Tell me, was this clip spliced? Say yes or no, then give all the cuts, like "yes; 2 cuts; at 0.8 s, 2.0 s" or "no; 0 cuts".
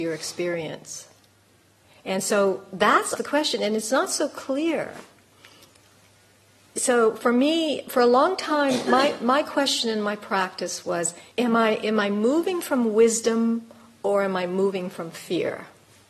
yes; 2 cuts; at 3.2 s, 11.3 s